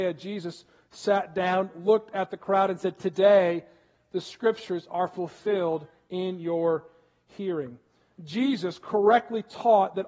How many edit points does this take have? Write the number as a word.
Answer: zero